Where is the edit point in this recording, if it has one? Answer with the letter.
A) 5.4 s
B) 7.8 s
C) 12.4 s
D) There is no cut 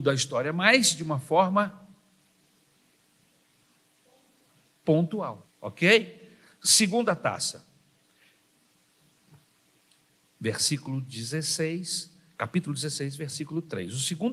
A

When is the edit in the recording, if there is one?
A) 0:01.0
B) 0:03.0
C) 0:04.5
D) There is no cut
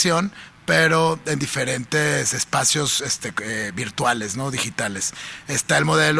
D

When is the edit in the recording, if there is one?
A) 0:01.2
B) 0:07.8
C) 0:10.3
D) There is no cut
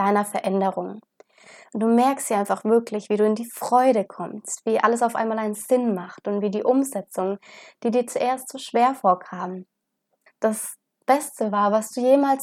C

